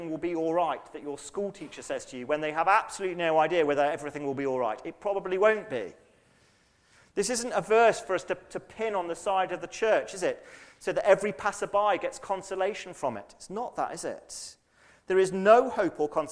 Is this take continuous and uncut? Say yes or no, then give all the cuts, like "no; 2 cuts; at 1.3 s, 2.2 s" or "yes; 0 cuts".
yes; 0 cuts